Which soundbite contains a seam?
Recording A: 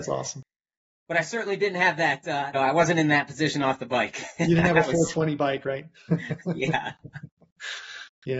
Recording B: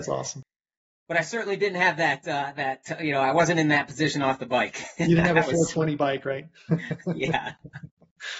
A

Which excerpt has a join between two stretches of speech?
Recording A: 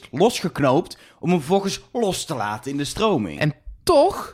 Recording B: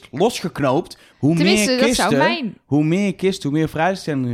B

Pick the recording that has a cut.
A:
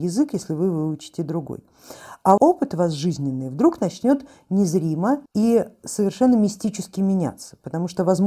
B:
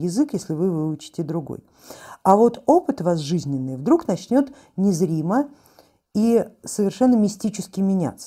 A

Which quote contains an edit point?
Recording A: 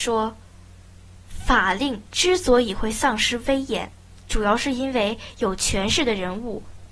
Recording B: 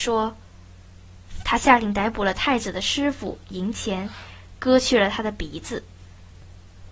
B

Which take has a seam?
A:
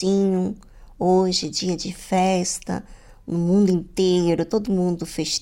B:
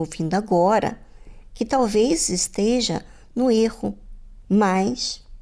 B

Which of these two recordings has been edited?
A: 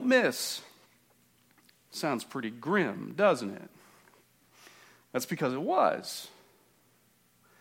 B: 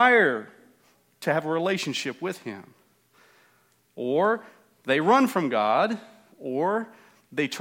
A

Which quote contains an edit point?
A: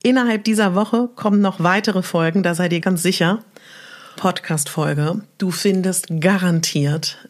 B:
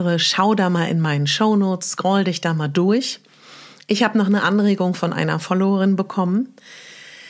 A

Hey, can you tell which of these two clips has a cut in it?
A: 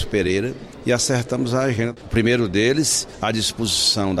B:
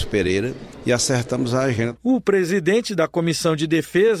B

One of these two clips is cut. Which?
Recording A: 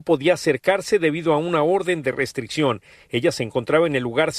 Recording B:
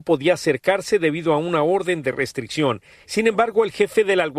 B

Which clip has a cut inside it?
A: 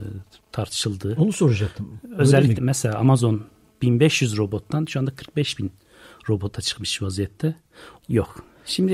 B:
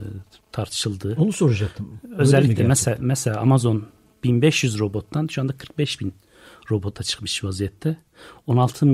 A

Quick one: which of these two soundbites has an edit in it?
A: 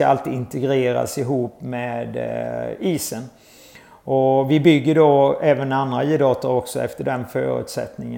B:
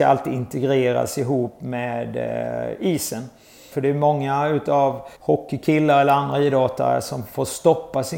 B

